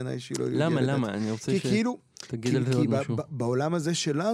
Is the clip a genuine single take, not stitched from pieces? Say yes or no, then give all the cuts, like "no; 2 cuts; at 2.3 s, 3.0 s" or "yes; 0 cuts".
yes; 0 cuts